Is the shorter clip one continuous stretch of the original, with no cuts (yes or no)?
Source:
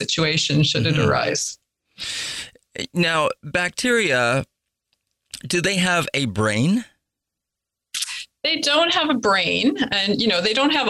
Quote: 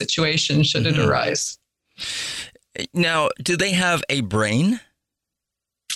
no